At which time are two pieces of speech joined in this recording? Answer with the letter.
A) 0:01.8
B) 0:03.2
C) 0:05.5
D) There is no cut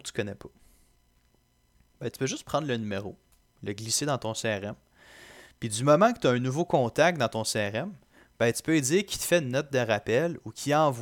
D